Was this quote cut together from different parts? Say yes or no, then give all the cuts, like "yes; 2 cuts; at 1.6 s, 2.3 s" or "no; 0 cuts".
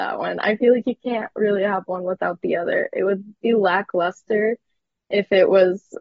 no; 0 cuts